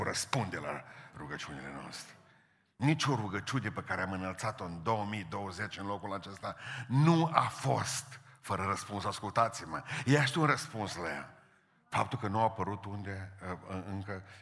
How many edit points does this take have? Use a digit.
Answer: 0